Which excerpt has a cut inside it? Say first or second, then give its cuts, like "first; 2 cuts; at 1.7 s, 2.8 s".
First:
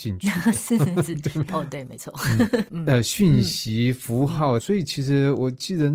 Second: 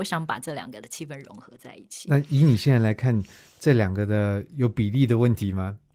first; 3 cuts; at 1.5 s, 2.7 s, 4.6 s